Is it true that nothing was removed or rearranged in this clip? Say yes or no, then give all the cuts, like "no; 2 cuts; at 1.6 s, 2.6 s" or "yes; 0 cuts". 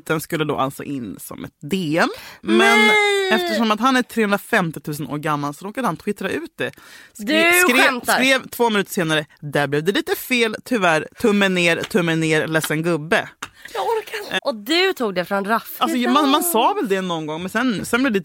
no; 2 cuts; at 14.4 s, 15.8 s